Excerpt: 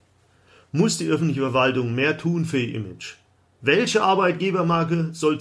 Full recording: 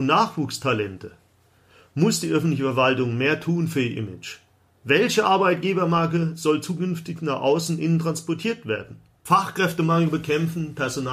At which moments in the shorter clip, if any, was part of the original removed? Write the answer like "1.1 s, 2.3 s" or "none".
none